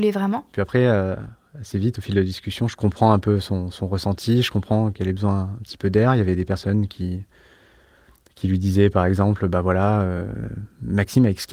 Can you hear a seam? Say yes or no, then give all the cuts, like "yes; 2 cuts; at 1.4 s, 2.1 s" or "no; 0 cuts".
no; 0 cuts